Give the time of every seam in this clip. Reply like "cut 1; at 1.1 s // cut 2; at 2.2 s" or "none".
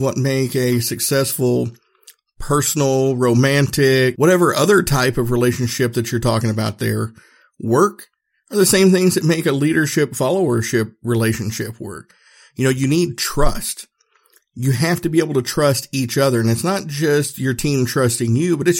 cut 1; at 4.1 s